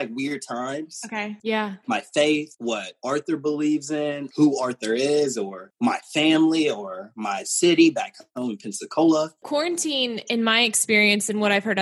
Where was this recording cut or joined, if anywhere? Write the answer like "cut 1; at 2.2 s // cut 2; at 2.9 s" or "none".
cut 1; at 1.4 s